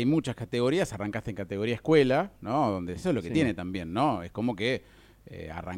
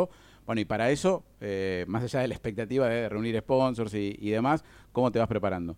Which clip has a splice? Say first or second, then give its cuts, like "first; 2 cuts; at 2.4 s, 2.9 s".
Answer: first; 1 cut; at 3.0 s